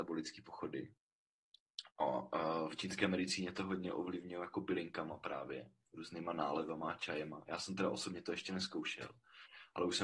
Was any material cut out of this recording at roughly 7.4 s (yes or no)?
no